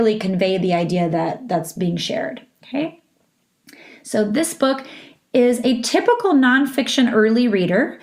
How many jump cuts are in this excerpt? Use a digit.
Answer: 0